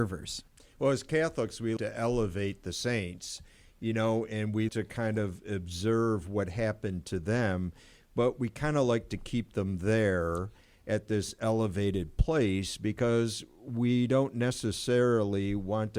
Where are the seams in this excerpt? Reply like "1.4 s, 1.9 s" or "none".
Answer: 1.8 s, 4.7 s